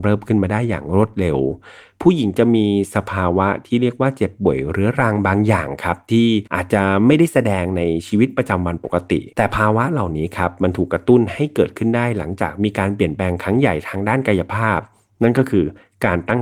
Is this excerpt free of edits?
no; 2 cuts; at 6.5 s, 9.3 s

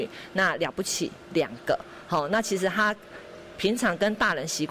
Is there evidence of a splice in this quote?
no; 0 cuts

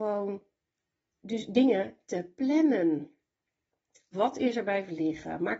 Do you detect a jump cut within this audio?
yes; 1 cut; at 4.1 s

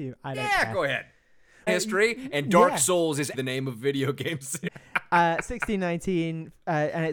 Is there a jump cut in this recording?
yes; 3 cuts; at 1.7 s, 3.3 s, 4.7 s

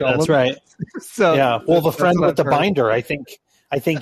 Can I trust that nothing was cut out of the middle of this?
yes; 0 cuts

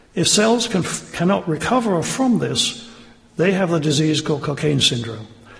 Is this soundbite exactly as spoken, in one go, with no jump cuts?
yes; 0 cuts

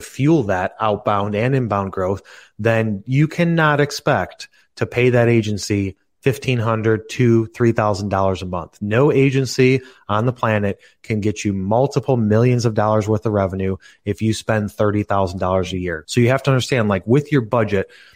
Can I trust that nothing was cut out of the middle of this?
yes; 0 cuts

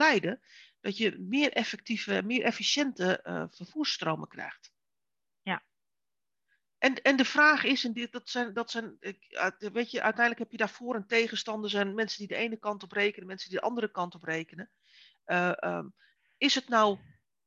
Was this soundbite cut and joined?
no; 0 cuts

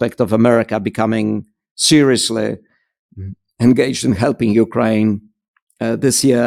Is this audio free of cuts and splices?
yes; 0 cuts

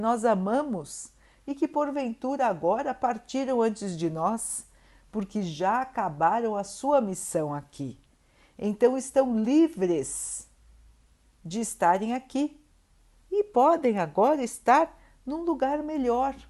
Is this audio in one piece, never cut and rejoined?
yes; 0 cuts

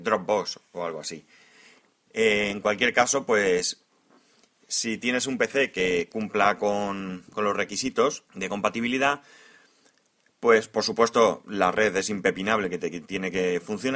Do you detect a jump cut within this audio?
yes; 1 cut; at 8.3 s

